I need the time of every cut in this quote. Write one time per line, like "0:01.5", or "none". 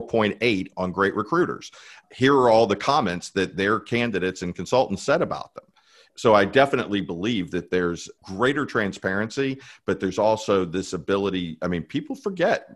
none